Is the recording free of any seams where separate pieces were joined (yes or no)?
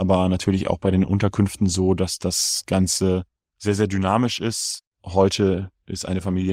yes